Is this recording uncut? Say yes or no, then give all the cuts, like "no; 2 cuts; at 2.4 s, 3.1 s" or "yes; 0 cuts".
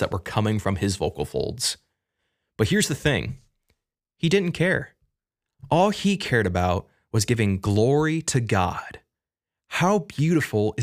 yes; 0 cuts